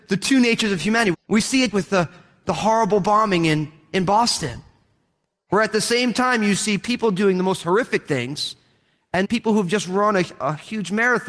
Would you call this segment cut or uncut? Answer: cut